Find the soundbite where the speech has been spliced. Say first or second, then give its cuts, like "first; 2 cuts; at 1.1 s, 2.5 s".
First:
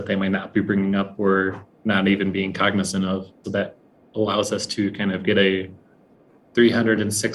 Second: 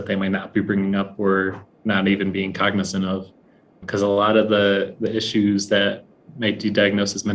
first; 1 cut; at 3.4 s